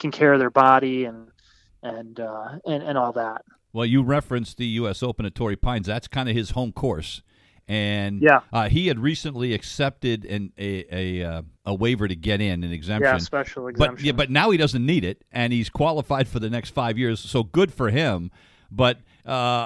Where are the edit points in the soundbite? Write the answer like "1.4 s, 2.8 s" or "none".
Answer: 11.6 s